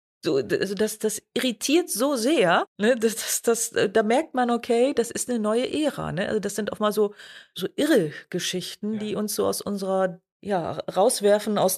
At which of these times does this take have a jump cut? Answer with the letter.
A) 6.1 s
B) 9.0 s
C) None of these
C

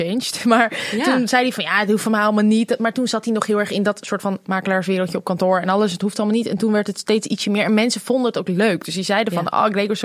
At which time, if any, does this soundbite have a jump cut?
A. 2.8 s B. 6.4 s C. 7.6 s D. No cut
D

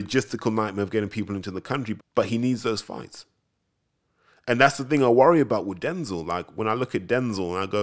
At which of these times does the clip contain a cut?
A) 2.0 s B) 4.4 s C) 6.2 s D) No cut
A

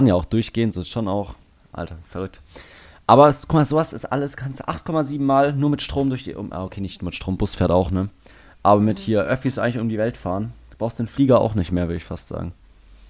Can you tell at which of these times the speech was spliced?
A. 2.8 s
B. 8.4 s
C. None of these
C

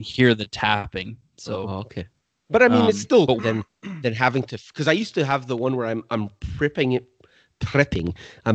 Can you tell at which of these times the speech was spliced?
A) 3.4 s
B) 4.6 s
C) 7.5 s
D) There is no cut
A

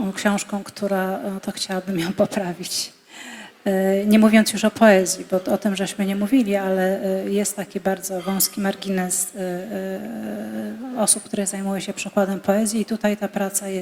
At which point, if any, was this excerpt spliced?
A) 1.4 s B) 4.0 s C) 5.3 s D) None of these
A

